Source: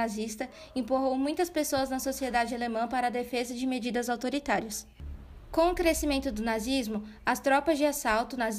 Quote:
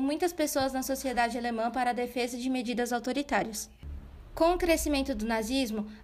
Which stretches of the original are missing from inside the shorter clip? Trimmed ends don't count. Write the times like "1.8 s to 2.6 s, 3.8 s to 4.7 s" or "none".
none